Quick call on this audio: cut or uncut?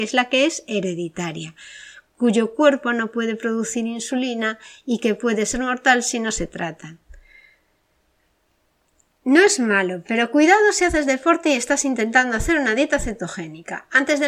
uncut